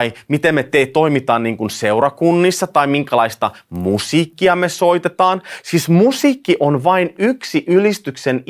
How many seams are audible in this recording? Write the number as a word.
zero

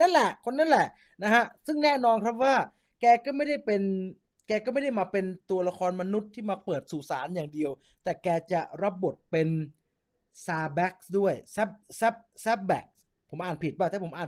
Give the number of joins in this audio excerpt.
zero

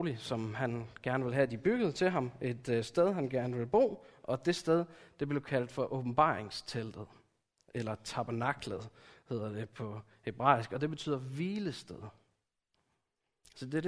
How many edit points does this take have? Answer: zero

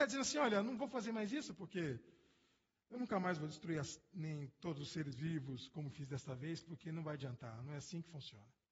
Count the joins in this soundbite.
zero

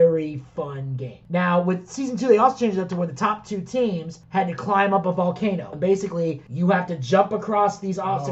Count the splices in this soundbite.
one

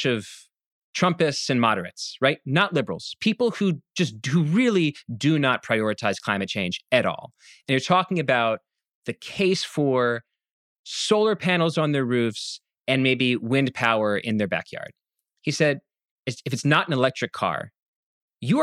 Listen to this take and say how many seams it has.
one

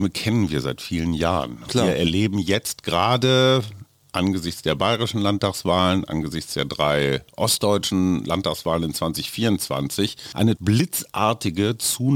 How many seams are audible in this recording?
zero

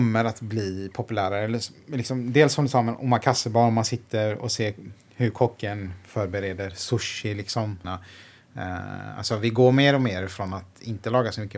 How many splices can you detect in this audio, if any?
one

